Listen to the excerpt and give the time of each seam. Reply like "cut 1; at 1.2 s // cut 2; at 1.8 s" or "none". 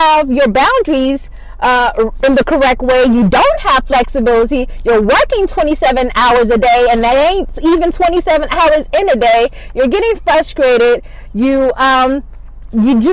none